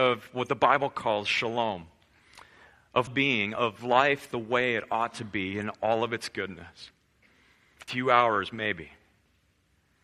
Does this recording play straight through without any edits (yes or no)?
no